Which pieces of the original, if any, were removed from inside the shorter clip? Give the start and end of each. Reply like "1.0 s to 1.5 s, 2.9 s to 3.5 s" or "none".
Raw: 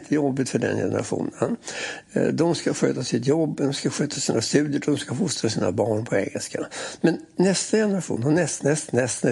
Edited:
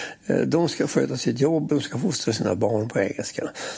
3.6 s to 4.9 s